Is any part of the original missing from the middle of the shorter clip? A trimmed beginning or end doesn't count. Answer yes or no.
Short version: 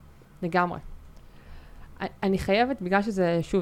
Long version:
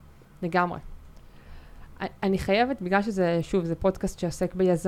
no